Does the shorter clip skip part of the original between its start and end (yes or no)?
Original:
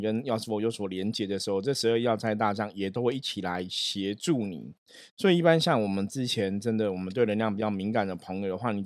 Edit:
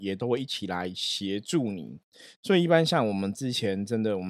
no